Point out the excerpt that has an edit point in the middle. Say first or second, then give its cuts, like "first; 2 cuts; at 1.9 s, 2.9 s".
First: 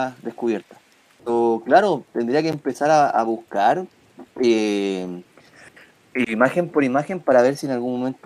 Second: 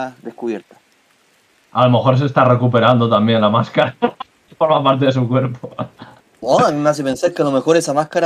first; 1 cut; at 1.2 s